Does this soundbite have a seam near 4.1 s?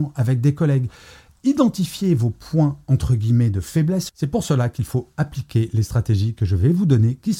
yes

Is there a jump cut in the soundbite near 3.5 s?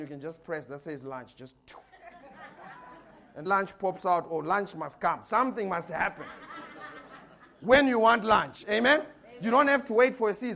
yes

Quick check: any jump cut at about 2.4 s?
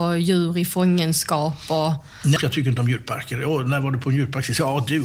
yes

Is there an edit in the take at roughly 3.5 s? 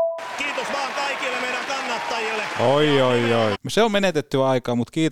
yes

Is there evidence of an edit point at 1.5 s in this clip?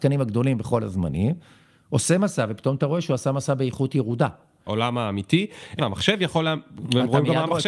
no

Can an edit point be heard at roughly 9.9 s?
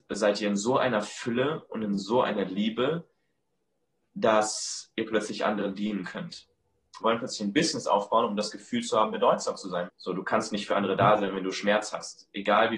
yes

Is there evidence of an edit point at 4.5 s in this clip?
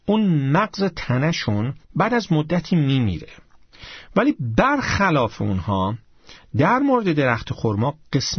no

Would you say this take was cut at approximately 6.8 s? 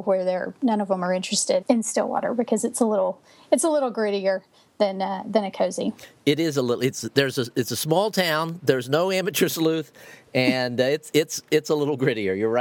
no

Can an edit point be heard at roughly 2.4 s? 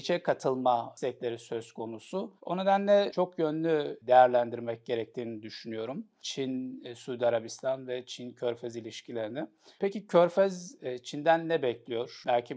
yes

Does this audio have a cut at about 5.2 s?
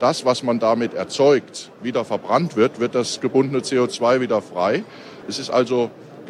yes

